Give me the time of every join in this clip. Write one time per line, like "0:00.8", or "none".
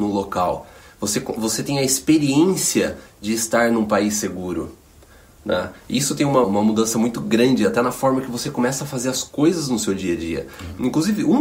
0:06.4